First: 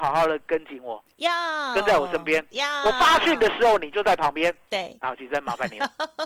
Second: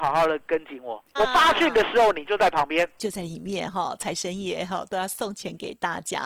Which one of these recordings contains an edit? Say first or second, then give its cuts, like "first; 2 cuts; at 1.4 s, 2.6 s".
second; 2 cuts; at 1.2 s, 3.0 s